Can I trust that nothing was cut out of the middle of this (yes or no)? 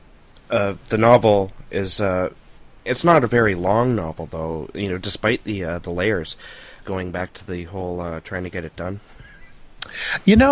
no